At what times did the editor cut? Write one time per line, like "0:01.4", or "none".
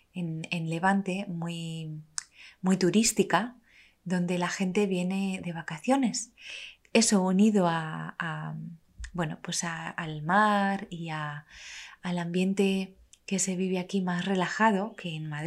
0:06.8